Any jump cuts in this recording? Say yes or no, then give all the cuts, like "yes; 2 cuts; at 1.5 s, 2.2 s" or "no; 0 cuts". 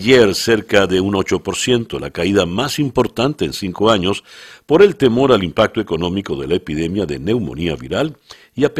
no; 0 cuts